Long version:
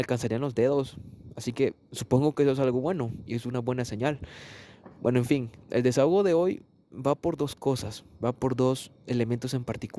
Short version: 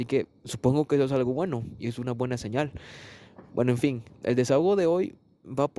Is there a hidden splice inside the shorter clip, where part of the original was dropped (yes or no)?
no